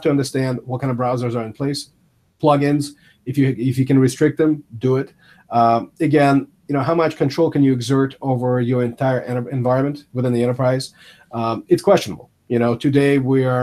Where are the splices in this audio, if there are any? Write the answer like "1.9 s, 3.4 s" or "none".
none